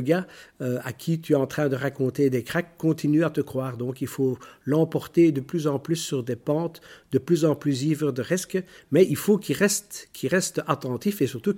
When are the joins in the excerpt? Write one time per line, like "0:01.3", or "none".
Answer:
none